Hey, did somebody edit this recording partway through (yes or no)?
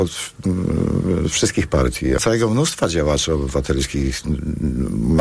yes